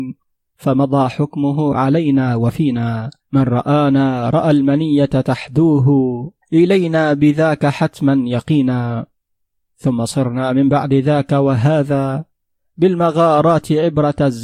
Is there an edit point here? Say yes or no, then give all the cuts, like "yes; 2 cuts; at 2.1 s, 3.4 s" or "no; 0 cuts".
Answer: yes; 2 cuts; at 3.2 s, 6.4 s